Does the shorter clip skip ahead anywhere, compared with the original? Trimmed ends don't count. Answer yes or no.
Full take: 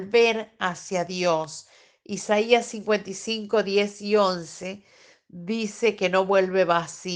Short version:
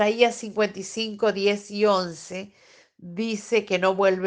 no